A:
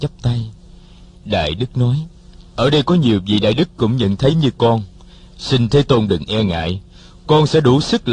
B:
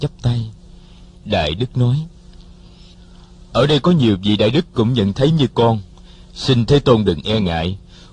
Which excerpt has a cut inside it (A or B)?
A